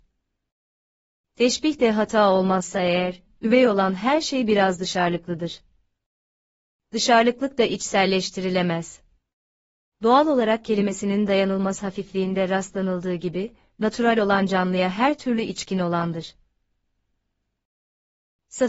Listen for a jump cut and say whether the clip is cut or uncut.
cut